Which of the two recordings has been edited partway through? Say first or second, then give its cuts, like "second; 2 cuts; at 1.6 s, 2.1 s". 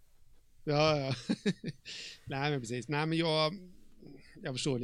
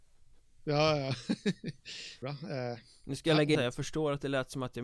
second; 2 cuts; at 2.2 s, 3.6 s